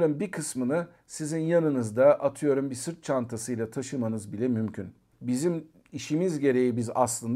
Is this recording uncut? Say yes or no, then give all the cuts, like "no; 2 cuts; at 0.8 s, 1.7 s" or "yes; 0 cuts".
no; 1 cut; at 5.1 s